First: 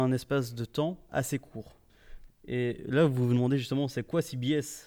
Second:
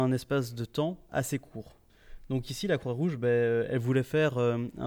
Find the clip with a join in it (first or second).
first